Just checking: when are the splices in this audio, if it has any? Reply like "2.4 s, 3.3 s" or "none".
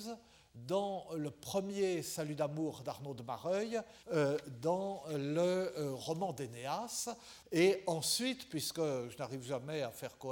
4.0 s, 7.4 s